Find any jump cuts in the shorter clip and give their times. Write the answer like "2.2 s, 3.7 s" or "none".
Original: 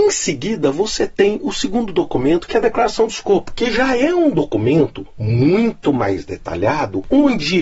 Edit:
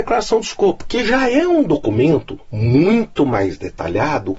none